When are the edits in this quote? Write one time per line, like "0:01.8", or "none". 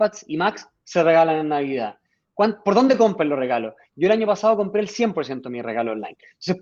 none